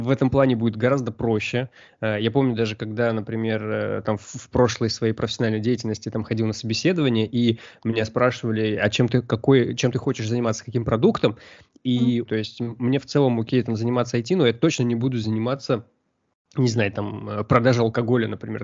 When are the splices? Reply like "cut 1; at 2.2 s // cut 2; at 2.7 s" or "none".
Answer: cut 1; at 12.3 s